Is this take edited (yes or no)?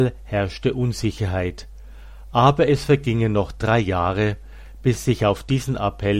no